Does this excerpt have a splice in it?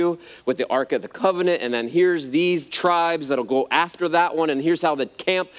no; 0 cuts

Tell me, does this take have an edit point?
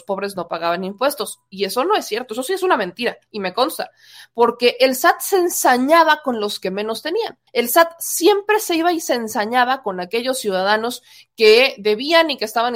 yes; 1 cut; at 7.5 s

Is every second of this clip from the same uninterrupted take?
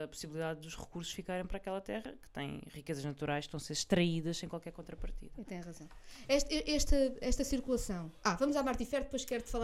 yes; 0 cuts

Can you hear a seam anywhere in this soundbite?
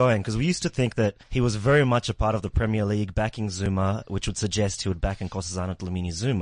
yes; 1 cut; at 1.2 s

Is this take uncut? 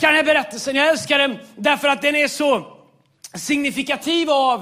yes; 0 cuts

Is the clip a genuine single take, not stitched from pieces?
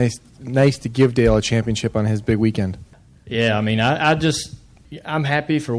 yes; 0 cuts

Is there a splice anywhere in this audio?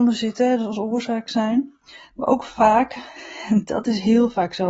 no; 0 cuts

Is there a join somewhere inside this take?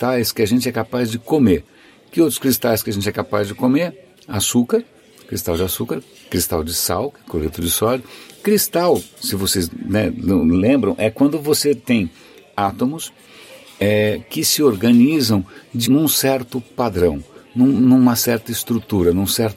yes; 1 cut; at 15.9 s

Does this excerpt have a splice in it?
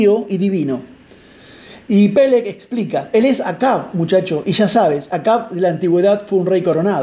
no; 0 cuts

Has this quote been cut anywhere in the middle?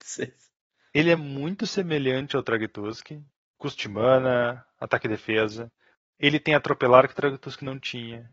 no; 0 cuts

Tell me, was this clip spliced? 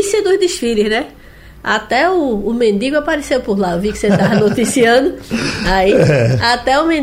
no; 0 cuts

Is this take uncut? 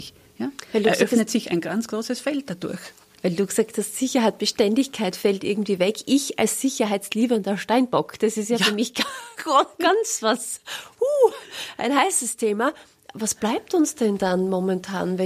yes; 0 cuts

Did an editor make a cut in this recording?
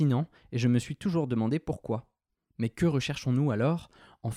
yes; 1 cut; at 2.5 s

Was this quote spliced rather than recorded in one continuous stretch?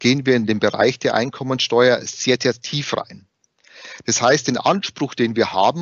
no; 0 cuts

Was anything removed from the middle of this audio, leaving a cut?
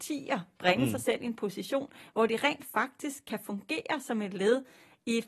no; 0 cuts

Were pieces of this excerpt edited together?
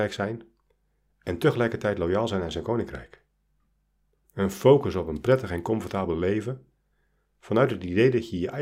yes; 1 cut; at 4.2 s

